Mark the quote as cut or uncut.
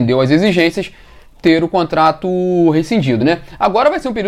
uncut